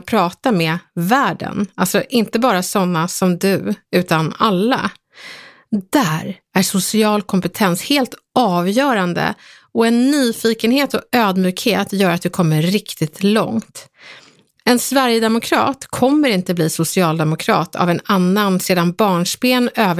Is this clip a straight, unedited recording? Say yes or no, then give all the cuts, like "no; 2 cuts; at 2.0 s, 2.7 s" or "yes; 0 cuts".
yes; 0 cuts